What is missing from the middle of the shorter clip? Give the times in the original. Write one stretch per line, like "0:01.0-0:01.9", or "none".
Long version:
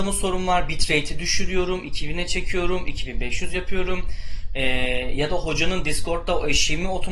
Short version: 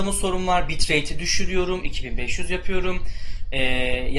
0:01.8-0:02.8